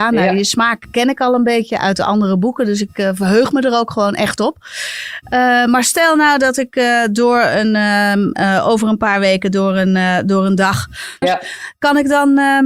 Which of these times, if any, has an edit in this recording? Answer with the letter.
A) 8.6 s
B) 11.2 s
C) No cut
B